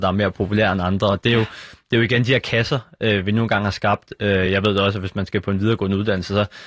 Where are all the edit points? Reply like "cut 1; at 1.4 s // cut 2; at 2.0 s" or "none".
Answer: none